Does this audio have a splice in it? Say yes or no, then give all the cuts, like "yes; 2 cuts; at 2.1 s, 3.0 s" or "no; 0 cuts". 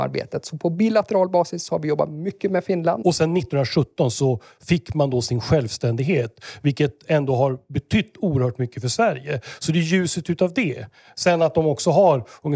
yes; 1 cut; at 3.0 s